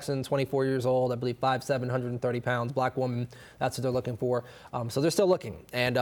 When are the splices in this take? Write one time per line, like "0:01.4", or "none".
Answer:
0:04.7